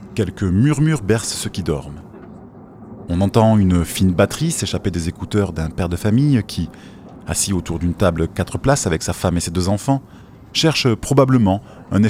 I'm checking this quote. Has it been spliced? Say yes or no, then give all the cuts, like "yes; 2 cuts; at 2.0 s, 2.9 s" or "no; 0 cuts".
no; 0 cuts